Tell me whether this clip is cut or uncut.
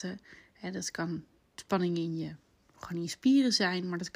uncut